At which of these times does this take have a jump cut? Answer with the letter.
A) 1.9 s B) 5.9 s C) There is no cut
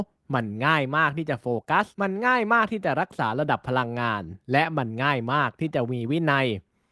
A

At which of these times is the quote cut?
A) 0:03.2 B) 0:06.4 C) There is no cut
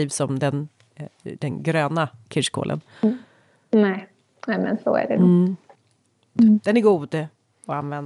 B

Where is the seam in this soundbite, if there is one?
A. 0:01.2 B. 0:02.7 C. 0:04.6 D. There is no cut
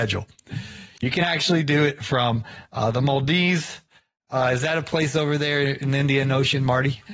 D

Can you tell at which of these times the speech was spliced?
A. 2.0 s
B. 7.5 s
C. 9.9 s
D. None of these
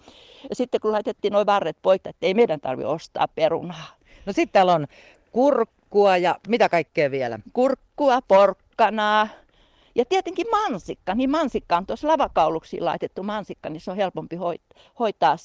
A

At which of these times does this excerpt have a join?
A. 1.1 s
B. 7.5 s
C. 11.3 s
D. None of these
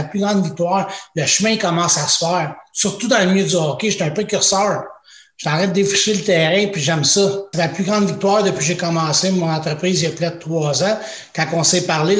B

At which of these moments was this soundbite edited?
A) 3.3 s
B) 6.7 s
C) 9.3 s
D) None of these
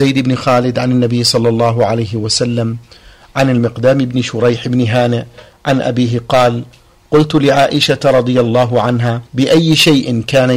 C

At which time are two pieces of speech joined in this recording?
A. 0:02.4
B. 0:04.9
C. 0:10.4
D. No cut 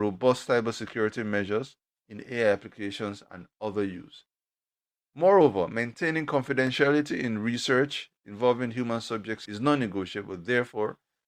D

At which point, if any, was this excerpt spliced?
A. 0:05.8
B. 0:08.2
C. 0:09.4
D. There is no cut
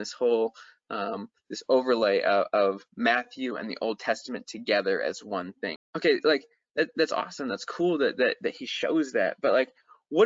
A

